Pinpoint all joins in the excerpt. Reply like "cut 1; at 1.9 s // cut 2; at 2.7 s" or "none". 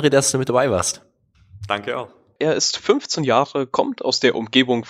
cut 1; at 2.4 s

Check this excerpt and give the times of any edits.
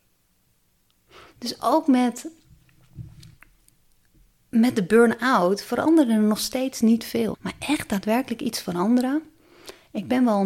cut 1; at 7.3 s

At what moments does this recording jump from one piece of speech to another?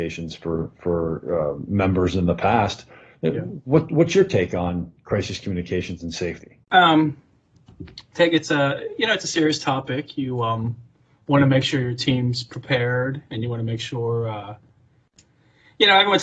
cut 1; at 6.6 s

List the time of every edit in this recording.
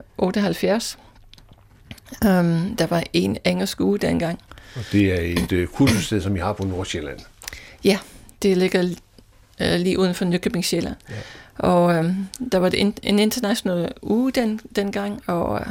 none

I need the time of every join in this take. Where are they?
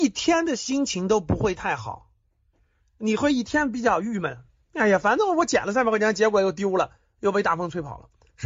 none

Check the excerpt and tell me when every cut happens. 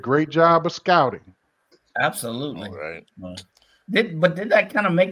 cut 1; at 1.7 s

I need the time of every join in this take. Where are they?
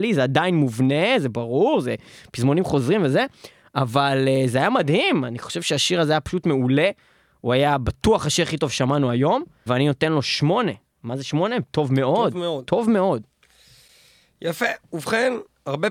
cut 1; at 9.7 s

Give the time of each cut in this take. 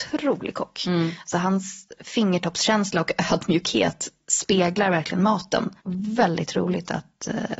cut 1; at 5.8 s

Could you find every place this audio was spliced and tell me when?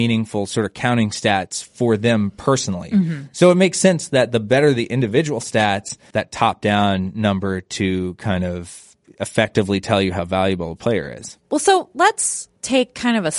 cut 1; at 6.1 s

